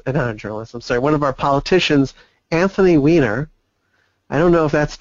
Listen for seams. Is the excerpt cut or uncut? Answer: uncut